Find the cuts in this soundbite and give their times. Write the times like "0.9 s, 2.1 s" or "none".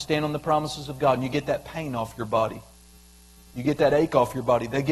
none